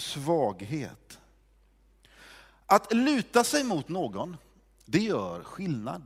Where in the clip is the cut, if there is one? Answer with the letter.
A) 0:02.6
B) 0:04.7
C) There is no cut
C